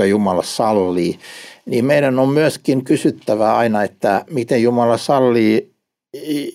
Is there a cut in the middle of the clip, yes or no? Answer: no